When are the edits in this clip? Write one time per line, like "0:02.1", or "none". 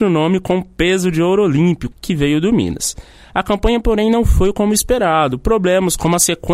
0:01.9